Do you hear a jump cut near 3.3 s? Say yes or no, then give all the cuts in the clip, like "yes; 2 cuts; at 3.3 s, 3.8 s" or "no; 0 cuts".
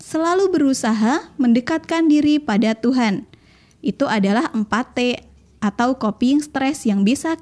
no; 0 cuts